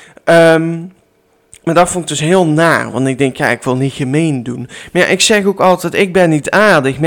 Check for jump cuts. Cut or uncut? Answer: uncut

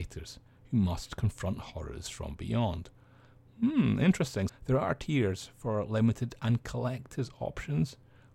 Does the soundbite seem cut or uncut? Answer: cut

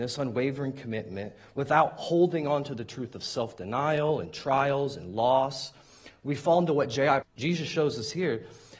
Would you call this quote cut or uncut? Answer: cut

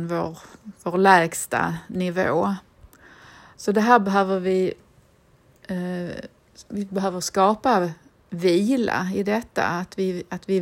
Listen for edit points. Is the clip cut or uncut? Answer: uncut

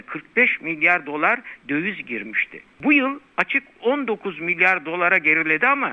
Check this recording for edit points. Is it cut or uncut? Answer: uncut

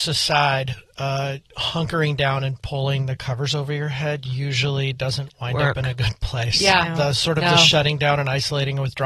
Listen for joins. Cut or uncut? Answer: uncut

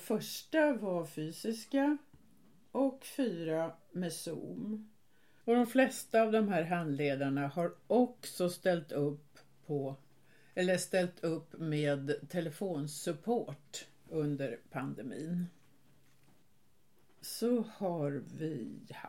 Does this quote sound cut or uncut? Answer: cut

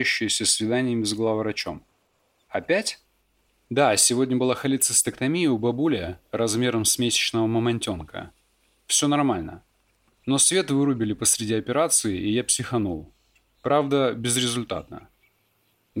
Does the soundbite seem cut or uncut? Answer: uncut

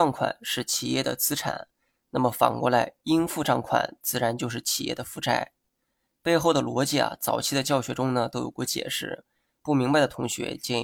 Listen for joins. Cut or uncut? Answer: uncut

